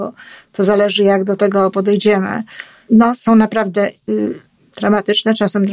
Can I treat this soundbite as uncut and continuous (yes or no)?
no